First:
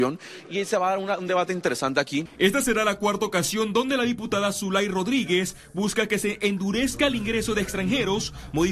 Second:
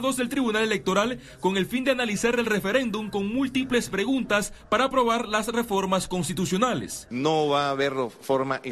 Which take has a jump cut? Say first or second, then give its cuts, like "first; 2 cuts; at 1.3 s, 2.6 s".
first; 1 cut; at 2.3 s